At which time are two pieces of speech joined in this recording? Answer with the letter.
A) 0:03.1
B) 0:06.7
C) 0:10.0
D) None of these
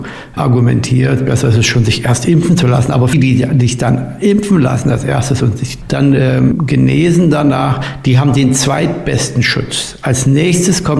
A